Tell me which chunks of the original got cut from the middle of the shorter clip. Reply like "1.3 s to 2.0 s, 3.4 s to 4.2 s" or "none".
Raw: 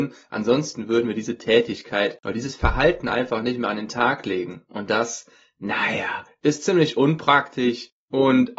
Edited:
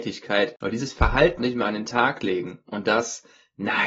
3.0 s to 3.4 s